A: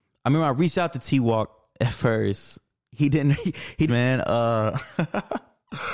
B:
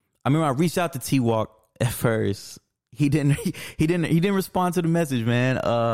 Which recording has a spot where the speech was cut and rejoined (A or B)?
A